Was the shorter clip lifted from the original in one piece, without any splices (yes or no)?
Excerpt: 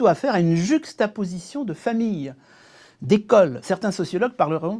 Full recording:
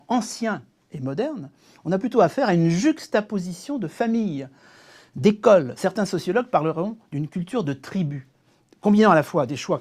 yes